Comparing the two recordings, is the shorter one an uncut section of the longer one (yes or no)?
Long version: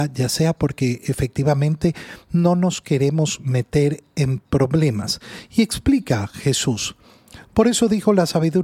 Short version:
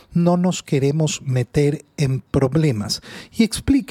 yes